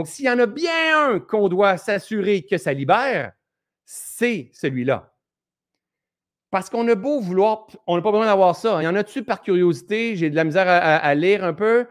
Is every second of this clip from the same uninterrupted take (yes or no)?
yes